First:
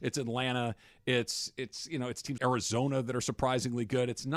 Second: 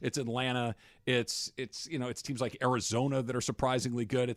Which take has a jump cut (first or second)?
first